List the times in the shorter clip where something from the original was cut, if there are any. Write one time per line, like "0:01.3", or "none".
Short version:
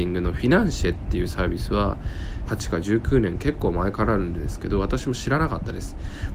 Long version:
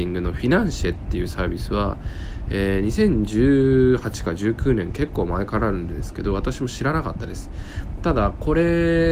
0:02.5